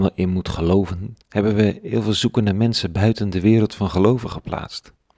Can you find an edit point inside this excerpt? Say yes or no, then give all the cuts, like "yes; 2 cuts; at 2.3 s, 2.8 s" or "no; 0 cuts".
no; 0 cuts